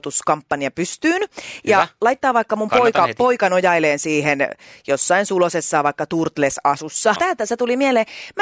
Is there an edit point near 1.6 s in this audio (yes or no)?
no